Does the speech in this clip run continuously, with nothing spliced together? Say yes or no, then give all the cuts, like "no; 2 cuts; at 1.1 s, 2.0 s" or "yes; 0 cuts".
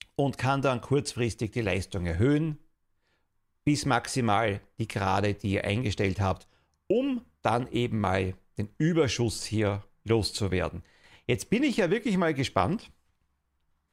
yes; 0 cuts